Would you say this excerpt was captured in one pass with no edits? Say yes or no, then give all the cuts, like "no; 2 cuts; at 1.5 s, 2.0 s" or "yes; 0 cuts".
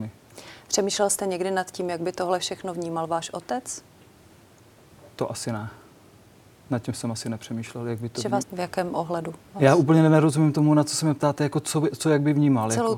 no; 1 cut; at 8.4 s